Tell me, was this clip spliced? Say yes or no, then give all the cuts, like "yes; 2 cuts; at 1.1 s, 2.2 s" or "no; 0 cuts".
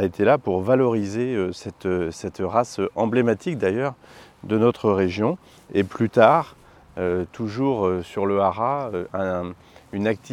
no; 0 cuts